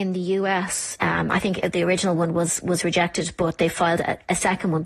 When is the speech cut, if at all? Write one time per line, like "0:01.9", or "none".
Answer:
0:01.0